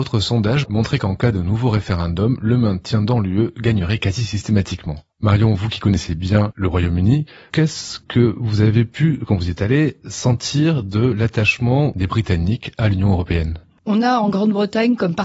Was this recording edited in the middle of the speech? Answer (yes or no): no